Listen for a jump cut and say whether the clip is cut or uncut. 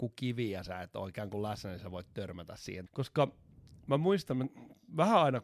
cut